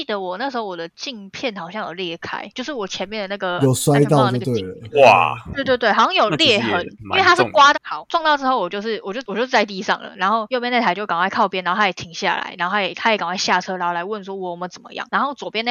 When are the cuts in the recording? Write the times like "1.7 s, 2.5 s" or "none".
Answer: 7.7 s